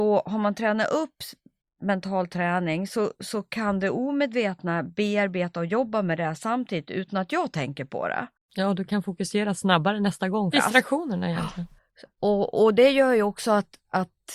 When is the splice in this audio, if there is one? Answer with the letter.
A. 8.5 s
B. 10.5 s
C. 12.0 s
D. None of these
B